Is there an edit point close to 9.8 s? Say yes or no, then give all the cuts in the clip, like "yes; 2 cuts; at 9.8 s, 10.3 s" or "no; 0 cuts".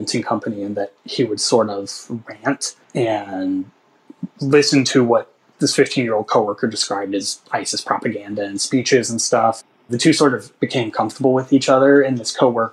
no; 2 cuts; at 2.8 s, 5.5 s